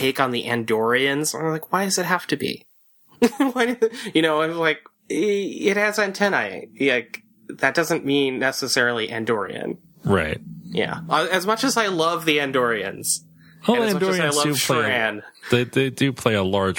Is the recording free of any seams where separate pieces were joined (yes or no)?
yes